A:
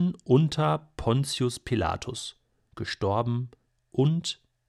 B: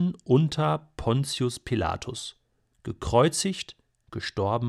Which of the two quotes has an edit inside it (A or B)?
A